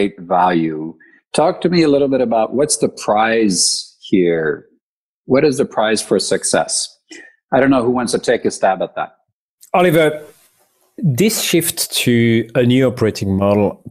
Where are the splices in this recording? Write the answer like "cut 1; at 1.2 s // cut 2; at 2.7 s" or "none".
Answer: none

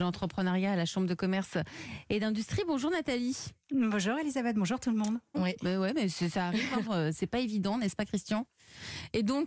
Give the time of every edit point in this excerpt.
cut 1; at 5.3 s // cut 2; at 6.9 s

